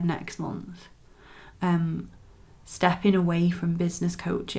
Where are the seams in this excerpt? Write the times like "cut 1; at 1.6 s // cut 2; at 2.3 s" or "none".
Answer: cut 1; at 1.5 s